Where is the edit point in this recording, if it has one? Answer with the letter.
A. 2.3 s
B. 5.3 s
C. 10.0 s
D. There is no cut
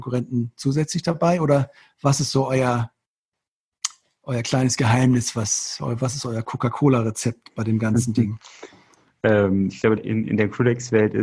C